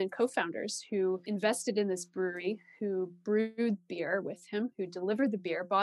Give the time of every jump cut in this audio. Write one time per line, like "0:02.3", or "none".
none